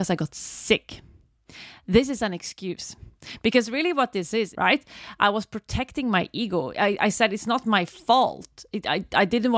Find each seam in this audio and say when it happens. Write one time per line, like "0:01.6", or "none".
0:04.5